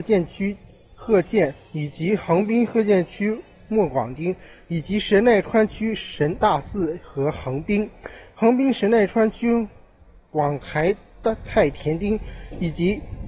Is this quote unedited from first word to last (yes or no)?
yes